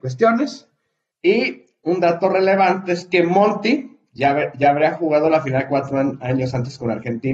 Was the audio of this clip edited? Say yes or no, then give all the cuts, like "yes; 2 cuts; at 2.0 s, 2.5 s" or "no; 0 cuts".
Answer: yes; 1 cut; at 1.1 s